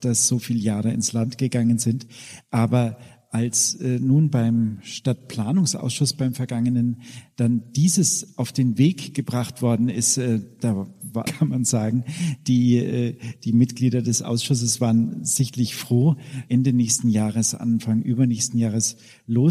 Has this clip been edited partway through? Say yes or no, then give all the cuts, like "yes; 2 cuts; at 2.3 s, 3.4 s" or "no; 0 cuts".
yes; 2 cuts; at 11.3 s, 16.5 s